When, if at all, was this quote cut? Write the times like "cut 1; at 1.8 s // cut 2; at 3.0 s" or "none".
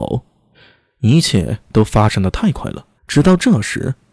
cut 1; at 3.0 s